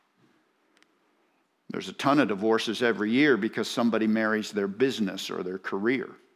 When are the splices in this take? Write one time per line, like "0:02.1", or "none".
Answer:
none